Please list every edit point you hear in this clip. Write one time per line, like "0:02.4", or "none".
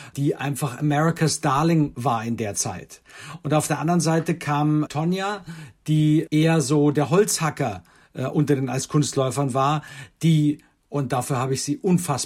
0:04.9